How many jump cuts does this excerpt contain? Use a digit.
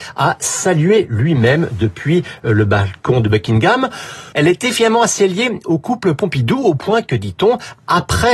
1